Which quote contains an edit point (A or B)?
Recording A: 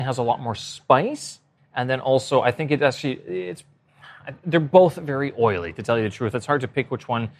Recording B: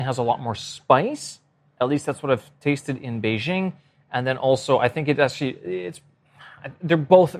A